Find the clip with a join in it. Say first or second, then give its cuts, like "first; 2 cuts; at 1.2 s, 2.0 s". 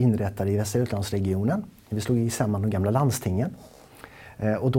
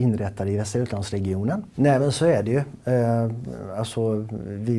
second; 1 cut; at 1.7 s